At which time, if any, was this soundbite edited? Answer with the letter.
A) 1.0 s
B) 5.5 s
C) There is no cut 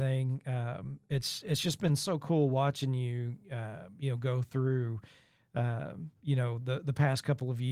C